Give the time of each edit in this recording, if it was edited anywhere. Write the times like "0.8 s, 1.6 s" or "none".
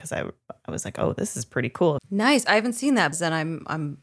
2.0 s, 3.1 s